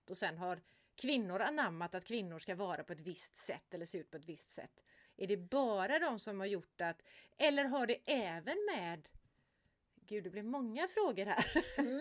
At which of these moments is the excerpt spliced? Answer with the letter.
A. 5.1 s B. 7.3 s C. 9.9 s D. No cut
A